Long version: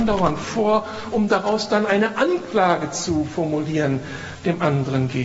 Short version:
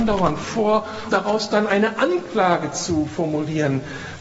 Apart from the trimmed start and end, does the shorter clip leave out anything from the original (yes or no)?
yes